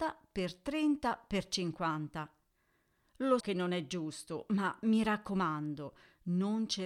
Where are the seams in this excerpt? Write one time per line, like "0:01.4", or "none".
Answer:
0:03.4